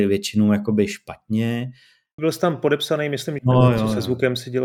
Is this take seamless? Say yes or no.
no